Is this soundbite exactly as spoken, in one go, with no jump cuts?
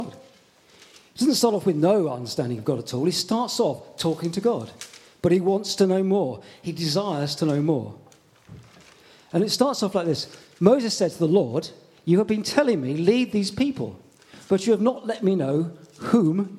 yes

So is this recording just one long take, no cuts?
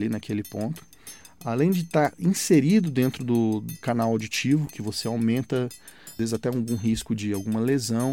yes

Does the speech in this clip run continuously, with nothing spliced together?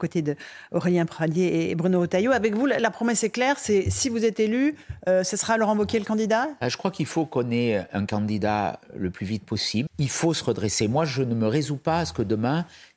no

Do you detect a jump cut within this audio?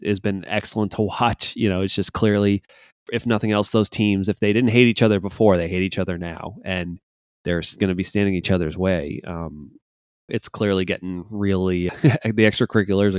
yes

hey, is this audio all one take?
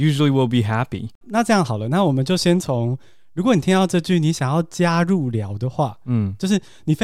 no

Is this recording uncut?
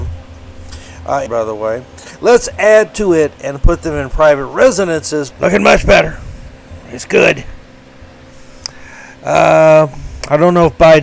no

